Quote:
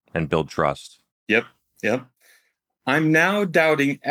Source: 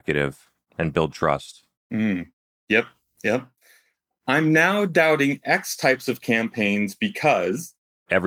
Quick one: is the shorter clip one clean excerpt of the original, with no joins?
no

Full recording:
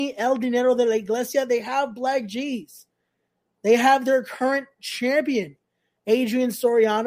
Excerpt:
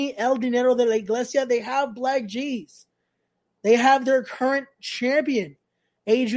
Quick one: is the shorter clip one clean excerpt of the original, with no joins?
yes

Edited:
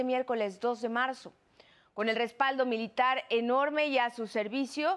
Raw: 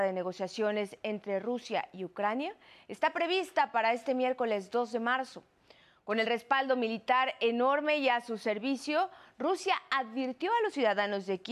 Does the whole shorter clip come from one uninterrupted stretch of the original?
yes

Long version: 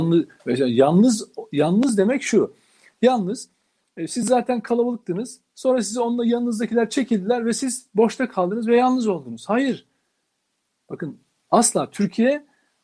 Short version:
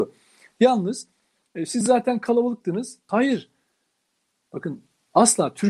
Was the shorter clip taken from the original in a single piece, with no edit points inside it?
no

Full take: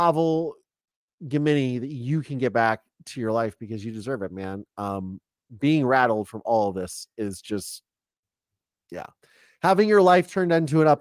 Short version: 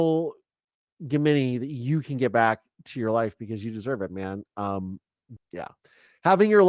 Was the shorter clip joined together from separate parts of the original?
yes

